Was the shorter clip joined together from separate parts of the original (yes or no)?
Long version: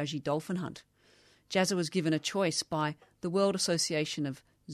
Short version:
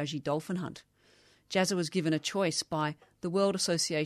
no